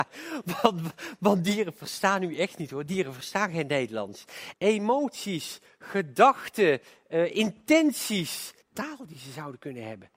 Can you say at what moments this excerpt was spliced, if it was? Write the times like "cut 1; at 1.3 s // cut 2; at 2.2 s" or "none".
cut 1; at 4.5 s // cut 2; at 8.6 s